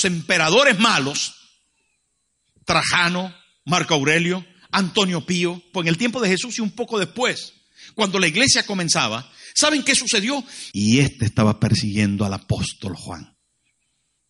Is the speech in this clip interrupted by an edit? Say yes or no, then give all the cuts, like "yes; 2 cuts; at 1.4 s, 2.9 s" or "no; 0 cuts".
yes; 2 cuts; at 5.7 s, 10.7 s